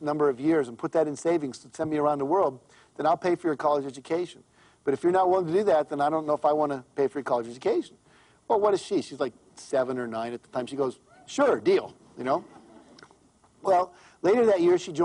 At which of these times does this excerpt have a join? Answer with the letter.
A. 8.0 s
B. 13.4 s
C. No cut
C